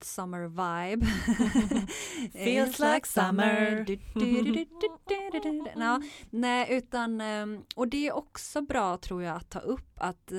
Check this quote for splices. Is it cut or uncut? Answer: uncut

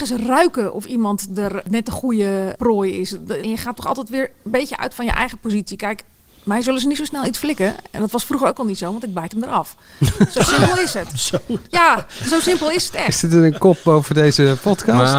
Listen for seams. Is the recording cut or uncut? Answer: cut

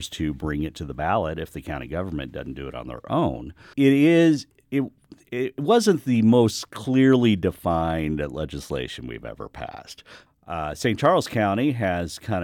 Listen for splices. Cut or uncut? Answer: cut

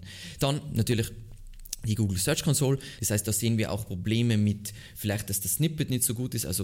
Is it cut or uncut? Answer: cut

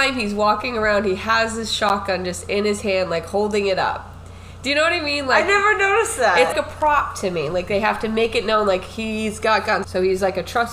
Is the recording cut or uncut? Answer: cut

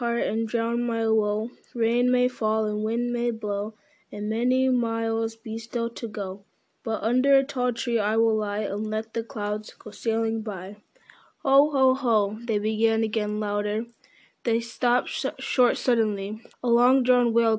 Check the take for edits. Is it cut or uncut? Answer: cut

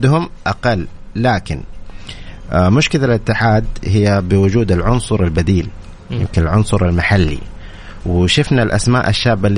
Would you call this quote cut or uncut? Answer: uncut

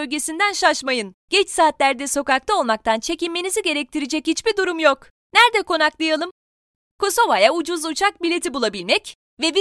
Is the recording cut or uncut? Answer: cut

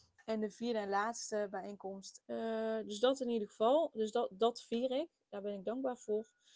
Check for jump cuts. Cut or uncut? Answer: cut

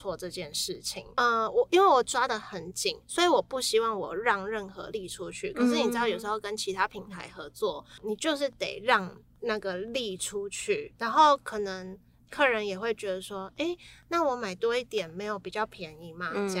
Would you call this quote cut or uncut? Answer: cut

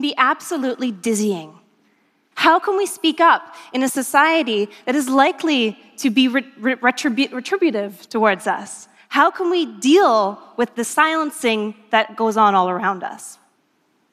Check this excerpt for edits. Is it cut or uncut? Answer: cut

